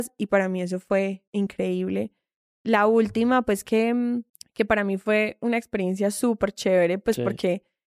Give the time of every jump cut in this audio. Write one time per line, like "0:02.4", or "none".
none